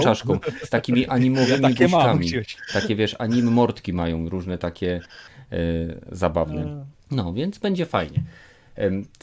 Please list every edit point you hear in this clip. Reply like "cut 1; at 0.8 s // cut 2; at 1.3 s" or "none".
cut 1; at 6.9 s